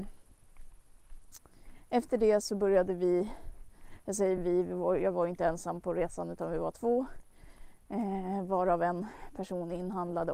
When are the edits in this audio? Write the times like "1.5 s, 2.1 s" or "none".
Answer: none